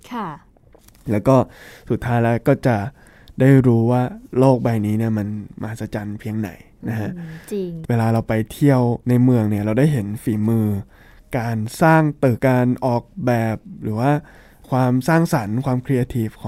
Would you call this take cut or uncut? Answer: cut